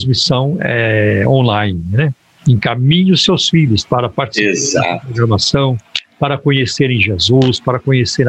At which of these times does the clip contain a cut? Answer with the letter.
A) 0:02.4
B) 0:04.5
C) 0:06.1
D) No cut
A